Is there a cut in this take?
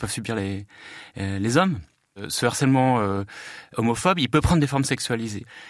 no; 0 cuts

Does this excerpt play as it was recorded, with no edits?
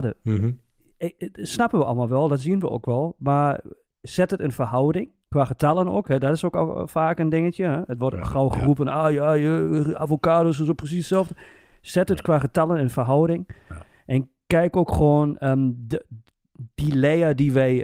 yes; 0 cuts

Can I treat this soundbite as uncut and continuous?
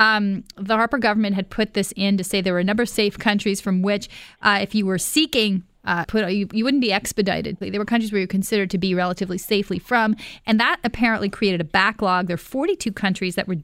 no; 2 cuts; at 6.0 s, 7.6 s

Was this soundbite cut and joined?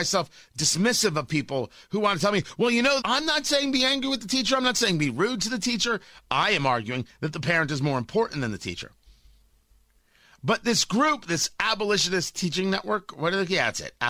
yes; 1 cut; at 3.0 s

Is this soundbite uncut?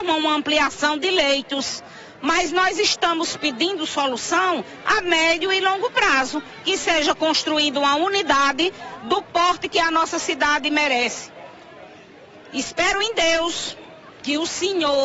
yes; 0 cuts

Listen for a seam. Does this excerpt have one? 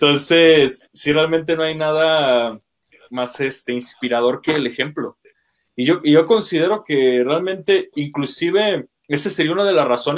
no; 0 cuts

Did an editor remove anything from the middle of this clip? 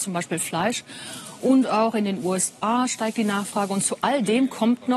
no; 0 cuts

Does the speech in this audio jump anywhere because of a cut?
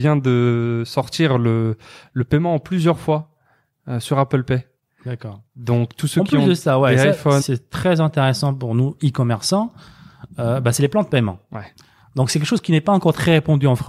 yes; 1 cut; at 7.4 s

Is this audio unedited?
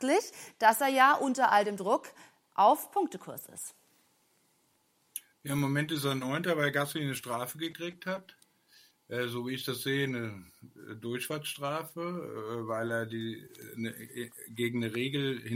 yes; 0 cuts

